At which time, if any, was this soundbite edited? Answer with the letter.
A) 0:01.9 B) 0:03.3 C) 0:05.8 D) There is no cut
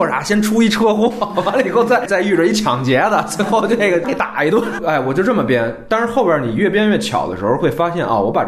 D